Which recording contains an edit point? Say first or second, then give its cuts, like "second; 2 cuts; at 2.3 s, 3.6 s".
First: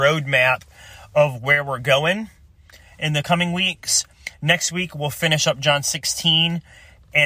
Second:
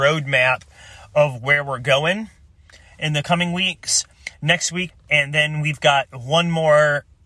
second; 1 cut; at 4.9 s